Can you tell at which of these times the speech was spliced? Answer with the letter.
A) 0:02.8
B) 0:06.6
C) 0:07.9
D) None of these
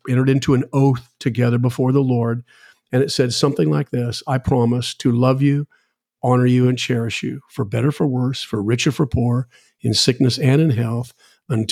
D